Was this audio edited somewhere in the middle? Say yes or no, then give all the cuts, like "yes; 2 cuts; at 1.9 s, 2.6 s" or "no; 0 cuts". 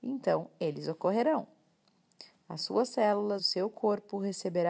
yes; 1 cut; at 3.4 s